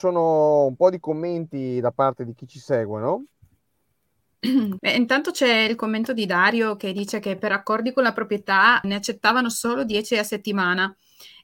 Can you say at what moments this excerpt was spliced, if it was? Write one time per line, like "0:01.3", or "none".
0:04.8
0:08.8